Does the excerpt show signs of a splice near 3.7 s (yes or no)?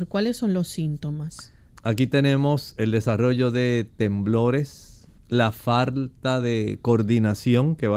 no